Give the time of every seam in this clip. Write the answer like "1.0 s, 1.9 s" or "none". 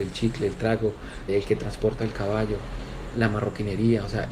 1.3 s, 3.1 s